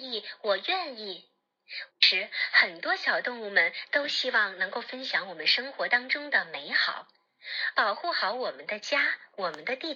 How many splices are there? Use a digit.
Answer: 2